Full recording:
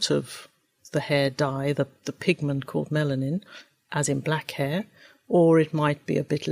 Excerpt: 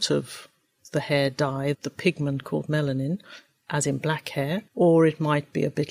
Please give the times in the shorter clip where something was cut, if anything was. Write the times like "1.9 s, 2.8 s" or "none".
1.7 s, 4.7 s